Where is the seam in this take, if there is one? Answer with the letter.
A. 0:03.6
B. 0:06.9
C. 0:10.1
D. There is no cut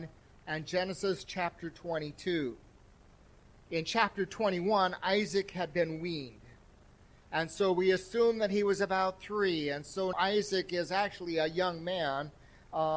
C